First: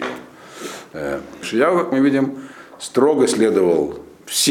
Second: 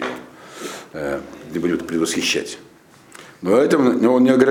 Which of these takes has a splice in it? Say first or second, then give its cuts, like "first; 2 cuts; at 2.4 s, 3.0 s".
first; 1 cut; at 1.4 s